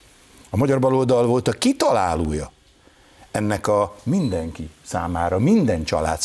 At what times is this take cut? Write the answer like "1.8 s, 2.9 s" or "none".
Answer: none